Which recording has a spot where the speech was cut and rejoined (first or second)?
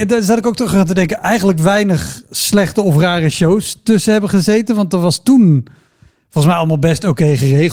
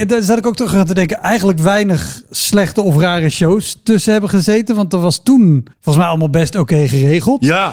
second